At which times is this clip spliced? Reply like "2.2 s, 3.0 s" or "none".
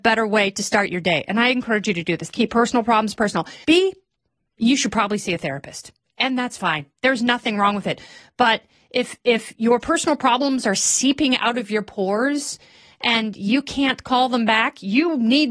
2.3 s, 3.6 s